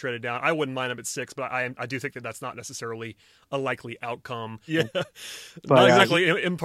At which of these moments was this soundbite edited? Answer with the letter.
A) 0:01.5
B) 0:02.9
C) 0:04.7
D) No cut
C